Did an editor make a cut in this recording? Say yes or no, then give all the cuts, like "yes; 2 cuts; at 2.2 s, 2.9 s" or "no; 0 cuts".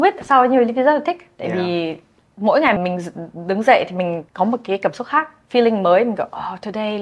yes; 2 cuts; at 2.8 s, 4.3 s